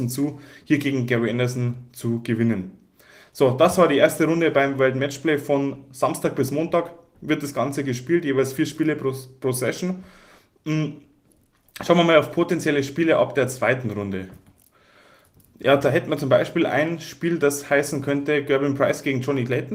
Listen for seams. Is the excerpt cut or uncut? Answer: uncut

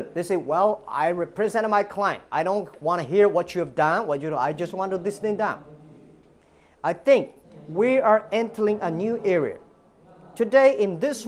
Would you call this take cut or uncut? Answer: uncut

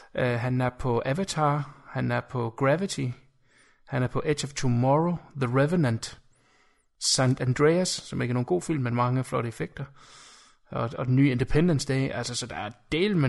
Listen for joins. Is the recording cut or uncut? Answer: uncut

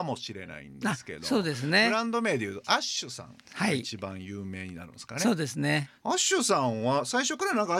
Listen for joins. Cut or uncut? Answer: uncut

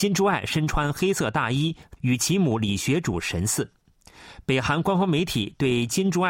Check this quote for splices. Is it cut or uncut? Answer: cut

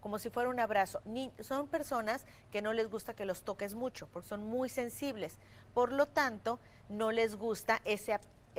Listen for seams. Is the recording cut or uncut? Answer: uncut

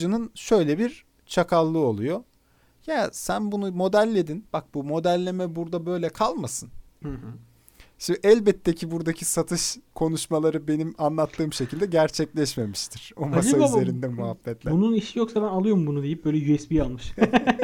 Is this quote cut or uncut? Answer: cut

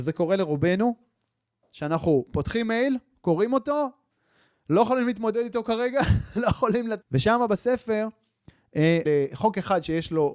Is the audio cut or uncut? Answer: cut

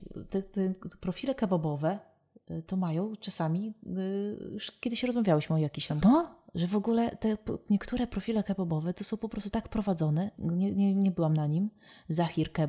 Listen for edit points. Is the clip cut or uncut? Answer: cut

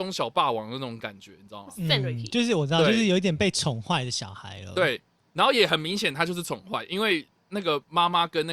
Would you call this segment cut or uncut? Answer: uncut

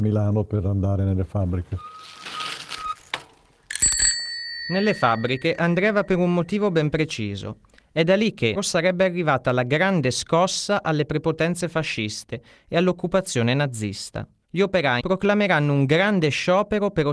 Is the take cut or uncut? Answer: cut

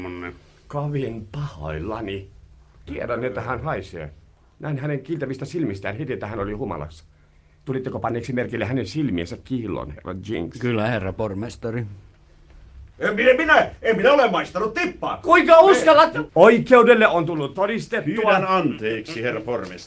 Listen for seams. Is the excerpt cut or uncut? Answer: cut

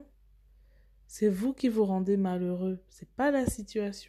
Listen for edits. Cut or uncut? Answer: uncut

